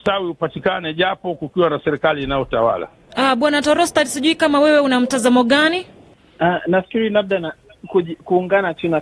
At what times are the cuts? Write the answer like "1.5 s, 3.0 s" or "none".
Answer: 3.1 s

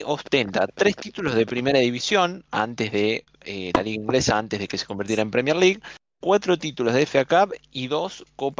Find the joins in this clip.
none

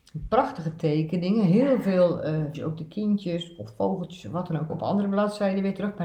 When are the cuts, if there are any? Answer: 2.5 s, 4.7 s

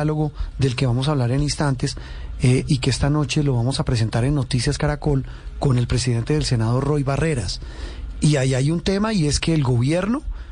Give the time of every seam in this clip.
8.2 s

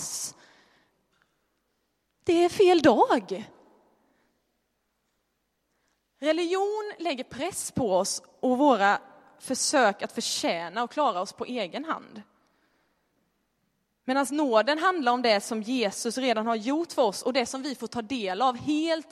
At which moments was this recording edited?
none

